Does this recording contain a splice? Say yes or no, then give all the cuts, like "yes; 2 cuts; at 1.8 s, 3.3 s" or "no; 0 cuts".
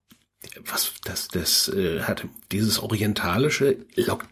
no; 0 cuts